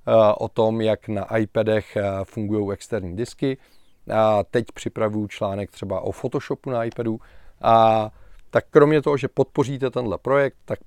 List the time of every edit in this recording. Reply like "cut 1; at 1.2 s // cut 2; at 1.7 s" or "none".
none